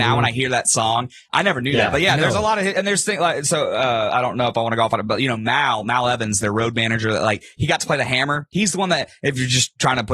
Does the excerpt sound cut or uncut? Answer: cut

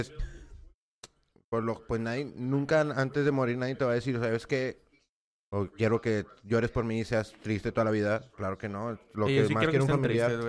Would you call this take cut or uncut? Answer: uncut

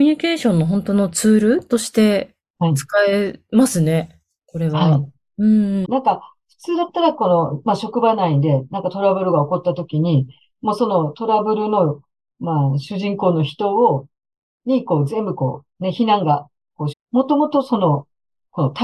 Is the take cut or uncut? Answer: cut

